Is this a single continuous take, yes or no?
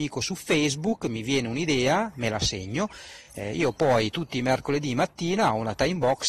yes